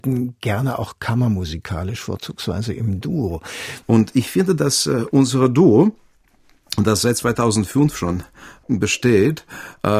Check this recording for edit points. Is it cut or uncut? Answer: cut